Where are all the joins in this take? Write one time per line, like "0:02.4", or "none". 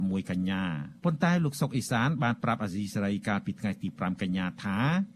0:01.0

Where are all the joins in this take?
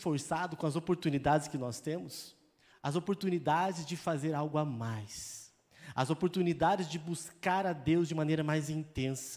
0:02.7

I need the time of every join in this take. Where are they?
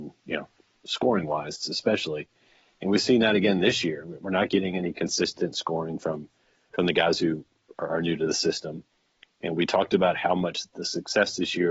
none

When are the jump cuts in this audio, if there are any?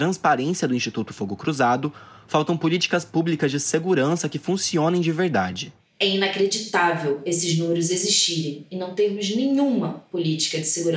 none

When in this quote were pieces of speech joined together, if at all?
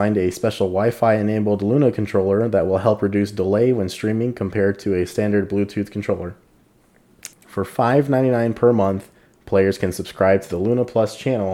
0:07.3

